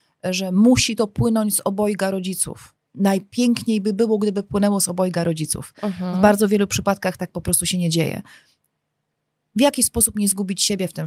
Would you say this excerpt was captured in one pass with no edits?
no; 1 cut; at 2.9 s

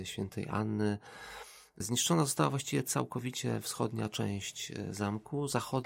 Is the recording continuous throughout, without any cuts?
yes; 0 cuts

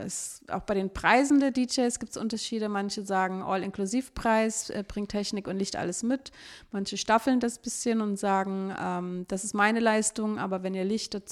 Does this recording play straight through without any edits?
yes; 0 cuts

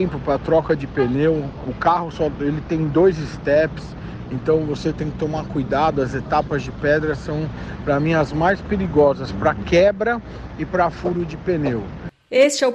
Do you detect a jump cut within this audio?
no; 0 cuts

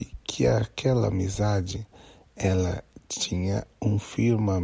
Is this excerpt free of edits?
yes; 0 cuts

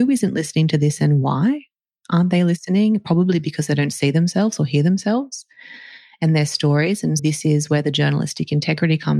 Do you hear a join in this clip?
yes; 1 cut; at 7.2 s

